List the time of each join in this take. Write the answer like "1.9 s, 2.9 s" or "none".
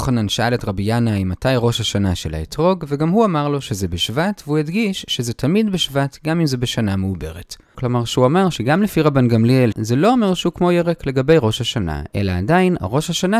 7.7 s, 9.7 s